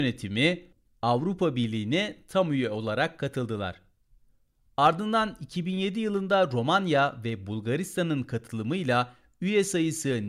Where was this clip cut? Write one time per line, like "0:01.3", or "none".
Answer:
none